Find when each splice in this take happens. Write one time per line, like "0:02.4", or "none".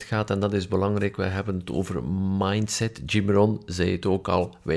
none